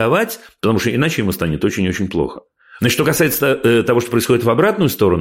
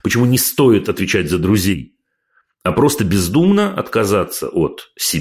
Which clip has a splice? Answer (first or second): first